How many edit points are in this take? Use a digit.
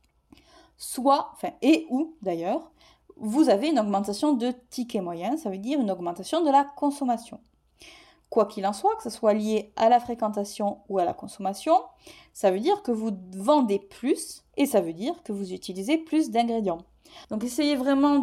2